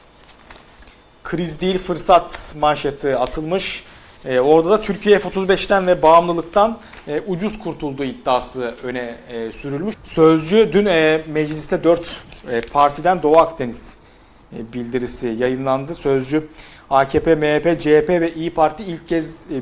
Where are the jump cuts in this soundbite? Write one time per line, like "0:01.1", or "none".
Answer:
0:09.9